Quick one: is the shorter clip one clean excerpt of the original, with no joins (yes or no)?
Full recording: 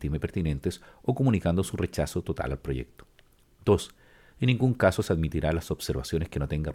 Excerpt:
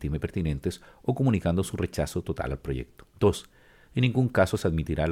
no